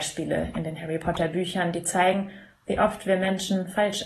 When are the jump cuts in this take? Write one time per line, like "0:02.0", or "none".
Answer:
none